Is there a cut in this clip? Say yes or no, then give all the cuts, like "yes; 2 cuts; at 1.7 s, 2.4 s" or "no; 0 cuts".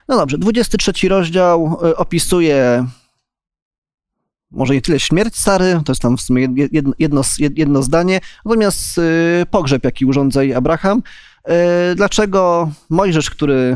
no; 0 cuts